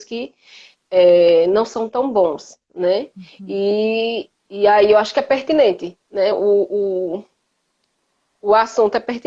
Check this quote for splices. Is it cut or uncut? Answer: uncut